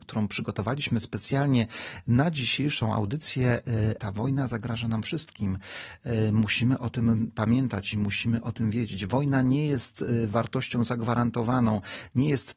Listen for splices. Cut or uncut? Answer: cut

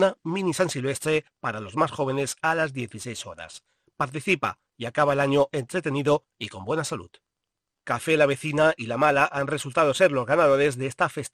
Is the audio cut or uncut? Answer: cut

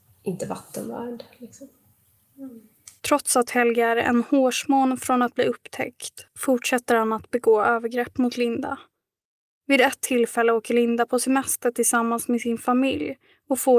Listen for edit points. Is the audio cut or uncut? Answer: cut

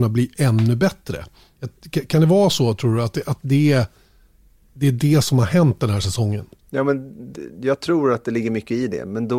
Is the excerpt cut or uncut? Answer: uncut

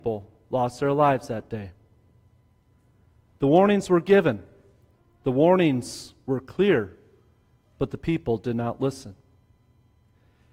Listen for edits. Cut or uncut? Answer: uncut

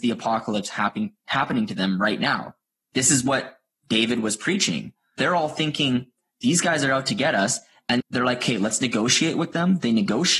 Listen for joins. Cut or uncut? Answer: cut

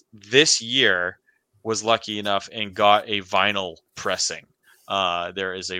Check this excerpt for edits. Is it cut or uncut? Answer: uncut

